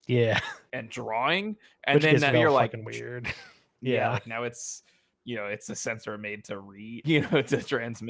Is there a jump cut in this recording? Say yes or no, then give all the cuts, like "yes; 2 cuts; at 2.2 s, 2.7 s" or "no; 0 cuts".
yes; 2 cuts; at 2.3 s, 7.0 s